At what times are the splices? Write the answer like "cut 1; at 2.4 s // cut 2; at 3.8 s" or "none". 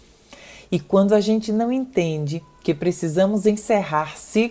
none